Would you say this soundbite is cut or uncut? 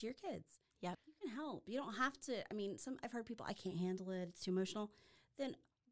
cut